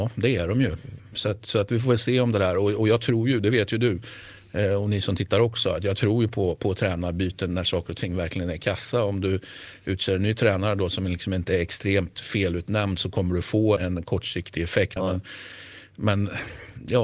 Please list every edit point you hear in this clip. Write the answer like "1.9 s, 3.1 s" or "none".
13.8 s, 15.0 s